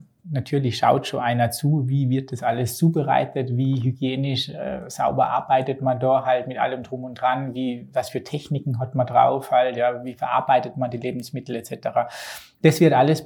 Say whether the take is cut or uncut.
uncut